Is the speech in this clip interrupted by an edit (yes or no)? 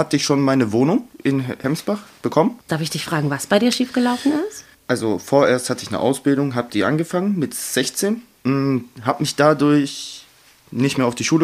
yes